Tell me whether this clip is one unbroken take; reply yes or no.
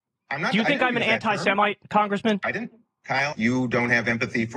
no